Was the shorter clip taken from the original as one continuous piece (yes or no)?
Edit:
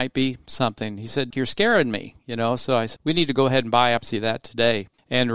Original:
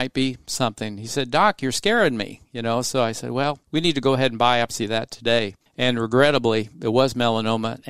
no